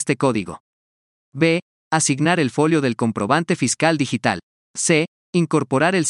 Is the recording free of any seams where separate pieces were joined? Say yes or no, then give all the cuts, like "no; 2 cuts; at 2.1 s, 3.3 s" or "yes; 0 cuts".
yes; 0 cuts